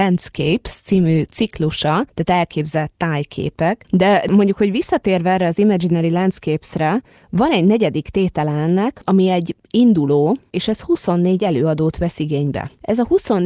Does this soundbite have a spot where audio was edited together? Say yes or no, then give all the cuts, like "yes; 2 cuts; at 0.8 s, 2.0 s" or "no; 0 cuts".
yes; 1 cut; at 3.9 s